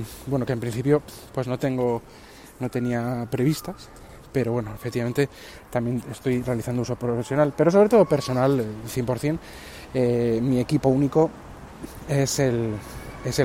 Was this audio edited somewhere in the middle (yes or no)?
no